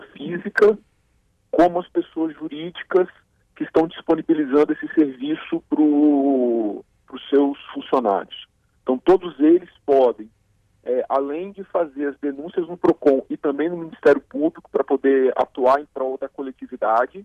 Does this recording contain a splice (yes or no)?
no